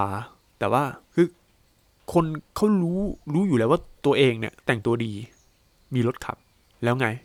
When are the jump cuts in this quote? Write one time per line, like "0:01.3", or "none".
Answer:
0:01.1
0:03.2
0:04.6